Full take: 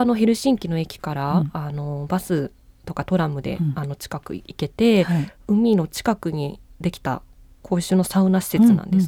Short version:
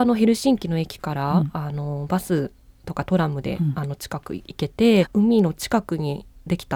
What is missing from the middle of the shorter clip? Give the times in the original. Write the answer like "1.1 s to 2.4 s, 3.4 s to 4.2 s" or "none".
5.0 s to 5.4 s